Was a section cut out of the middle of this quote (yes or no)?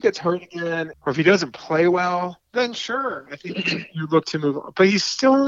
yes